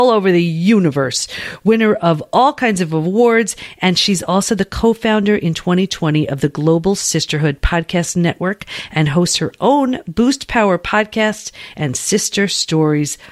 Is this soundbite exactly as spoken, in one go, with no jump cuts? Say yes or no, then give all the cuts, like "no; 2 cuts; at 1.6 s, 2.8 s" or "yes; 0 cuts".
yes; 0 cuts